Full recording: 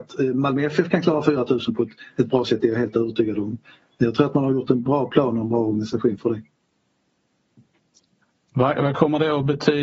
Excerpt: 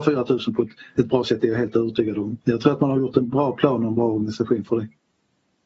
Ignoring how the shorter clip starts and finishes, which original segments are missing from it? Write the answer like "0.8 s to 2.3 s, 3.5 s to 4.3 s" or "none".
3.6 s to 3.9 s